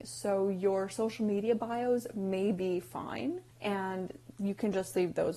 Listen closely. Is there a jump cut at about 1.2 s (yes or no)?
no